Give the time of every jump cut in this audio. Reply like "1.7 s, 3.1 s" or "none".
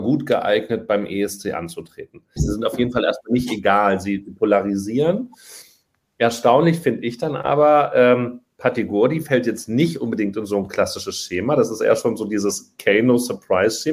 2.4 s